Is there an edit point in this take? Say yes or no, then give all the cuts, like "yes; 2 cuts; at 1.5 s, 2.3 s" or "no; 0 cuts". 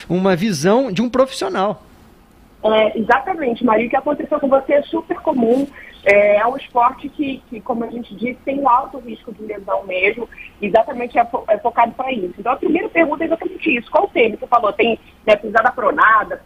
no; 0 cuts